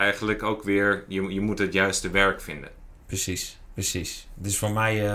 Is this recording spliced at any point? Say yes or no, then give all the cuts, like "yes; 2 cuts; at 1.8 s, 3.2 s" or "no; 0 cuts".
no; 0 cuts